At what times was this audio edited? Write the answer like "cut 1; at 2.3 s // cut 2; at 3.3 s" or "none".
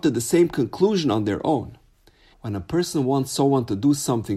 cut 1; at 2.3 s